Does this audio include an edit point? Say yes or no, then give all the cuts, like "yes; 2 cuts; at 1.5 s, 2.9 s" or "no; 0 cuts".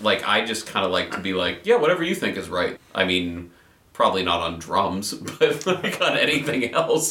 yes; 1 cut; at 2.8 s